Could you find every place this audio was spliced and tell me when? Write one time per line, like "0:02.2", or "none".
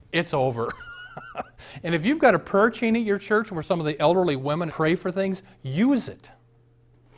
0:04.7